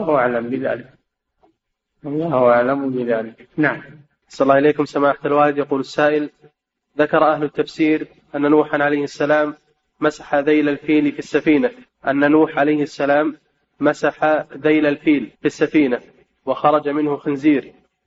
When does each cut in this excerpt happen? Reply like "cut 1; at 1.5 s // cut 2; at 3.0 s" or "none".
cut 1; at 11.9 s // cut 2; at 15.3 s